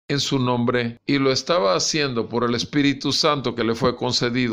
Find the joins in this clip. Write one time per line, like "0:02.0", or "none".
none